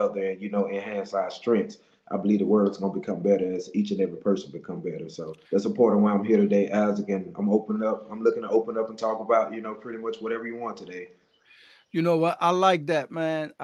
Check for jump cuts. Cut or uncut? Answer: cut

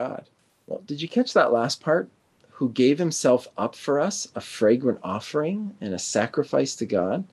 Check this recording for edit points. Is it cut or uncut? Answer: uncut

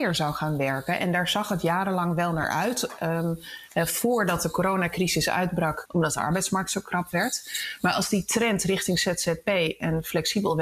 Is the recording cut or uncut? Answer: cut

